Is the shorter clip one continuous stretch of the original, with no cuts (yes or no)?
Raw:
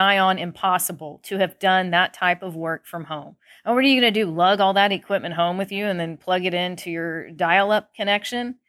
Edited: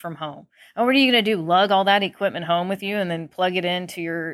yes